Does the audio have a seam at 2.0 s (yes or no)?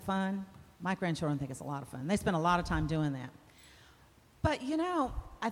no